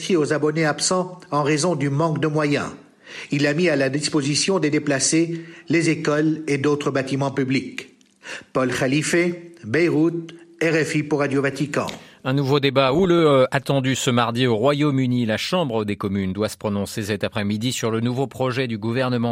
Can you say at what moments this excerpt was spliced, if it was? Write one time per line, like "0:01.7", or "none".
none